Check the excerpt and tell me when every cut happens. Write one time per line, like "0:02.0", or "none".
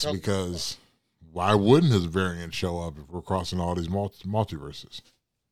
none